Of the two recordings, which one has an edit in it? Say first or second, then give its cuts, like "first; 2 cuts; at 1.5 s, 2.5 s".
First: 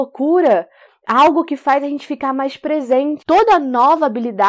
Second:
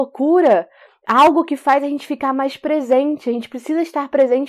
first; 1 cut; at 3.2 s